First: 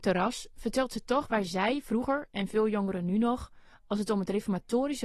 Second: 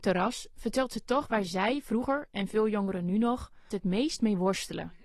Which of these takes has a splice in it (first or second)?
second